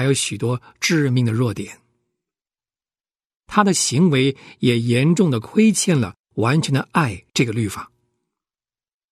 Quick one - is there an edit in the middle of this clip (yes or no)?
no